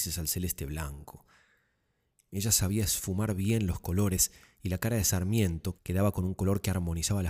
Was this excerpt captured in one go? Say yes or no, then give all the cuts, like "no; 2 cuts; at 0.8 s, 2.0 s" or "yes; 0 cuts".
no; 2 cuts; at 2.1 s, 5.8 s